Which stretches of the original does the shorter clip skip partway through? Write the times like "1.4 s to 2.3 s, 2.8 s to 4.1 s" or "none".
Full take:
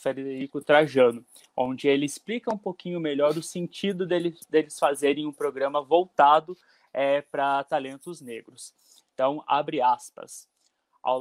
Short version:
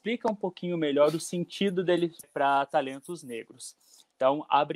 4.5 s to 7.2 s